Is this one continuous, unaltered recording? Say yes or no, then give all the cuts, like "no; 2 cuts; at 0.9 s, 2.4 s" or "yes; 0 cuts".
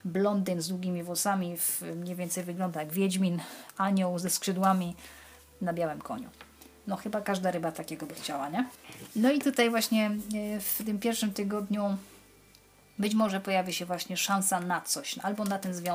yes; 0 cuts